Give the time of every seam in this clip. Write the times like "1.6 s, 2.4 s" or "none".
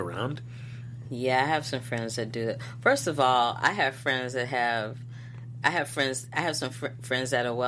none